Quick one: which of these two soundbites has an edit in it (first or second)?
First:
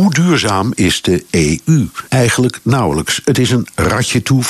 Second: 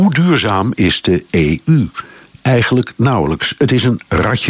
first